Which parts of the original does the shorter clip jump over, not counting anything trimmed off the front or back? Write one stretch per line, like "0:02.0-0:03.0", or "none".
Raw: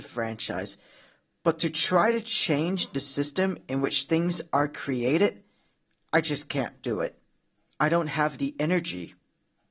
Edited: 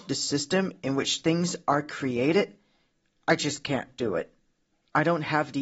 none

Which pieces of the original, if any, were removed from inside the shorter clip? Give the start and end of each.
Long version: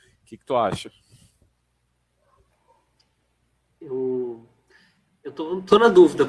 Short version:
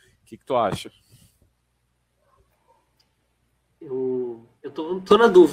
0:04.6-0:05.2

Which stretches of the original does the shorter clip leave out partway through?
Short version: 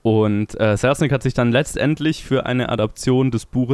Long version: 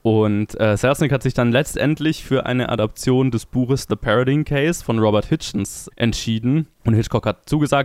none

